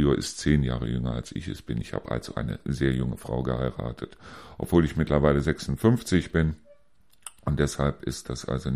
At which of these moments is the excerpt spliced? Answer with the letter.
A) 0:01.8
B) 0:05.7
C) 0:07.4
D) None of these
D